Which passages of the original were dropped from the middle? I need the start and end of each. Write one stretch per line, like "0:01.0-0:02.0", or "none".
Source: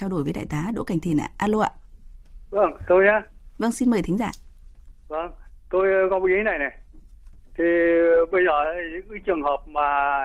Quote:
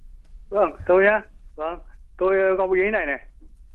0:03.5-0:05.0